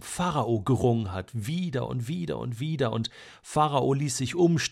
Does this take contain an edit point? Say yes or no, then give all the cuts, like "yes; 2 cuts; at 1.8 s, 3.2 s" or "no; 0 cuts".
no; 0 cuts